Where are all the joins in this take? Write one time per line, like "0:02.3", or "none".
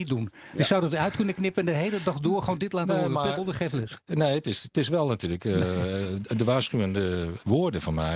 0:03.4